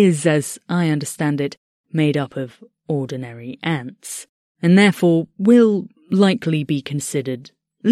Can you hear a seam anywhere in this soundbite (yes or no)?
no